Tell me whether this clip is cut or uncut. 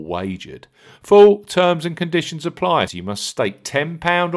cut